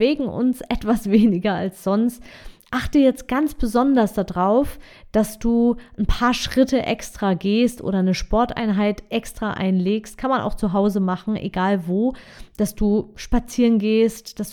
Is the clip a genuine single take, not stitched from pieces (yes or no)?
yes